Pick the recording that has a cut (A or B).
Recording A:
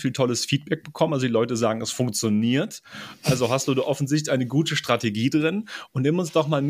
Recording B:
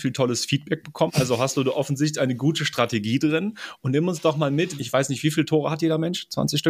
B